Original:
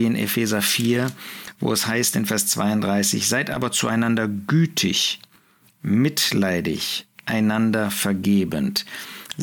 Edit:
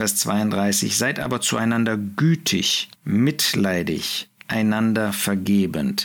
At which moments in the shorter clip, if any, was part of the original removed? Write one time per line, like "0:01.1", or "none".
0:03.0